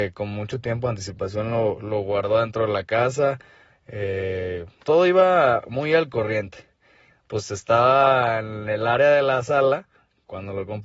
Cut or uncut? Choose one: cut